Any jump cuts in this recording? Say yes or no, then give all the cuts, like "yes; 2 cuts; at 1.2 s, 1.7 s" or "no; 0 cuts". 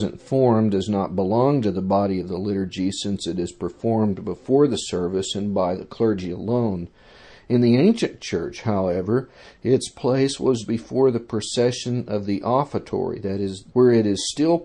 yes; 2 cuts; at 10.6 s, 13.7 s